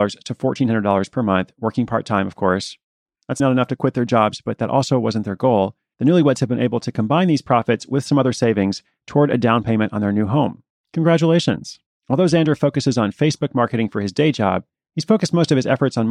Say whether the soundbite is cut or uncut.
cut